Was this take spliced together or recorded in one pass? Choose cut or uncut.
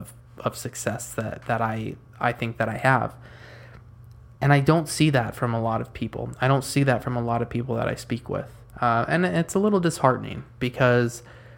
uncut